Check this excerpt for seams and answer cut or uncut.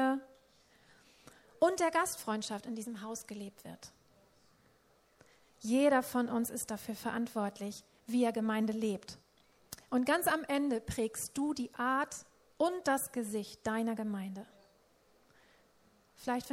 uncut